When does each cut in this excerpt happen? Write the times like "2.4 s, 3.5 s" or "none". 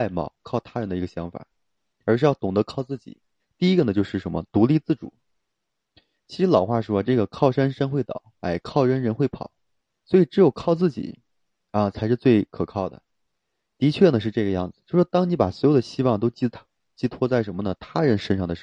3.4 s